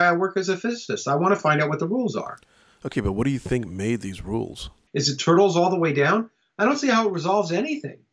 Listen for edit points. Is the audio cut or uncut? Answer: cut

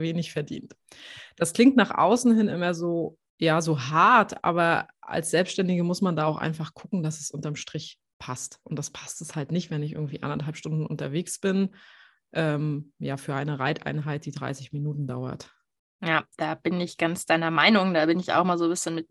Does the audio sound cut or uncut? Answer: uncut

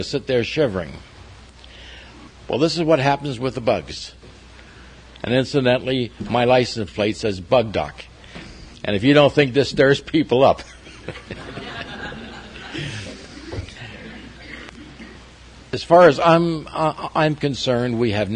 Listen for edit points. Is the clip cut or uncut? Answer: cut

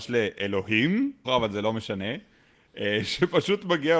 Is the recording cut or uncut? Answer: cut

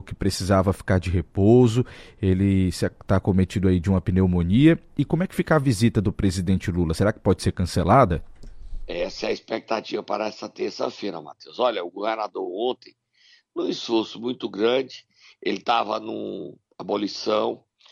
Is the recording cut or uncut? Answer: uncut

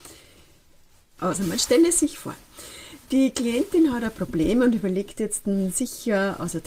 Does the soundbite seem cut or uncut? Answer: cut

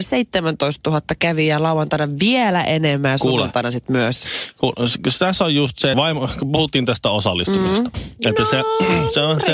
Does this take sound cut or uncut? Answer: cut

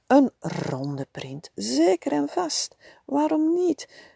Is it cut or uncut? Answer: cut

